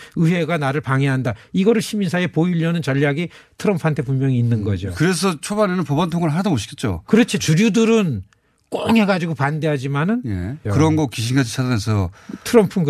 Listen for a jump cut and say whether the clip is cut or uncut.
cut